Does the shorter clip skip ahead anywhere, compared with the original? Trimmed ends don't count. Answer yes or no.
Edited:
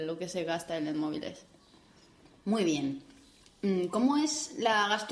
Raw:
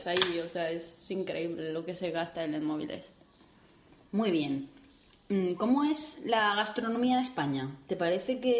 no